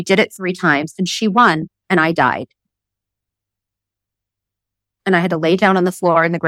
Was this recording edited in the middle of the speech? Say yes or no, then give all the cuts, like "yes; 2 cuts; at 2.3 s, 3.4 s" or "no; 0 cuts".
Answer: no; 0 cuts